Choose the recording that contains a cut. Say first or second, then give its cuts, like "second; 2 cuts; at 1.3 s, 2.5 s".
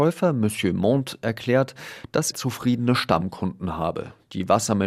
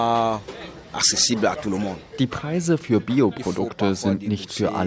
first; 1 cut; at 2.3 s